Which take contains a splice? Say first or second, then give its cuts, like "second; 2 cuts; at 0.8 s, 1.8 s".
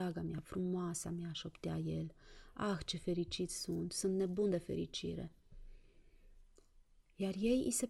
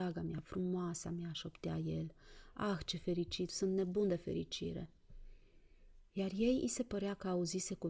second; 2 cuts; at 3.5 s, 6.1 s